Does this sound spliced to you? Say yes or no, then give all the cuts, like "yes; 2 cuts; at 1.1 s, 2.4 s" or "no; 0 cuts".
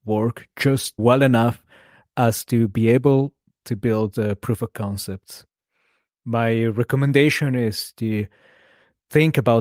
yes; 1 cut; at 1.0 s